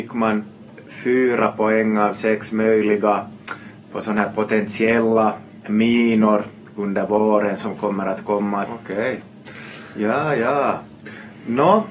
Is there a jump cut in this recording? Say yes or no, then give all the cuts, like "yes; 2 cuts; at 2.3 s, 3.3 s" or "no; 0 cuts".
yes; 1 cut; at 8.6 s